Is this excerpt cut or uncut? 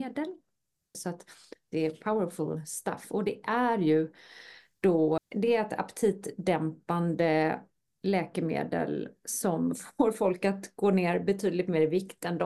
cut